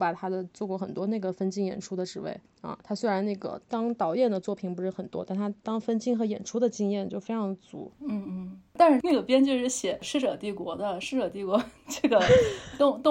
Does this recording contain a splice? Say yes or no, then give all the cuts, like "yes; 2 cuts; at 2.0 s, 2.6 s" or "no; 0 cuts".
no; 0 cuts